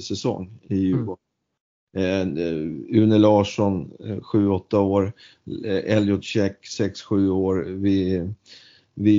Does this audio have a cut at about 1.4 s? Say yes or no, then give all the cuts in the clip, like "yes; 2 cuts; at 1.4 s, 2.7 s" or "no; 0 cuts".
no; 0 cuts